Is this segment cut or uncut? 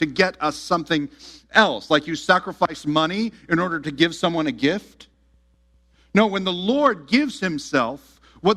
uncut